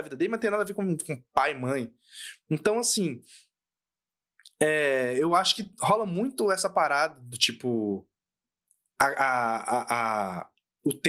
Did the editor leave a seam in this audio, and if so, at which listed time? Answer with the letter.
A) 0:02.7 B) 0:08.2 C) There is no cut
C